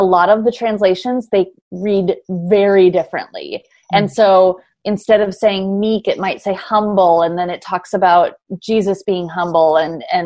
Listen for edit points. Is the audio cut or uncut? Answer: uncut